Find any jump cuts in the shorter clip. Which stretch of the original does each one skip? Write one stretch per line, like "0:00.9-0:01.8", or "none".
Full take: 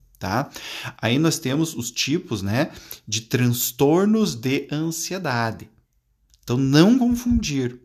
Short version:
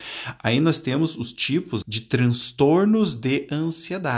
0:02.4-0:03.0